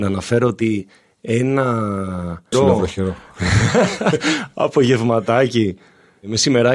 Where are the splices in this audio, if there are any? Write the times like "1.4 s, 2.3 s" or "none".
2.5 s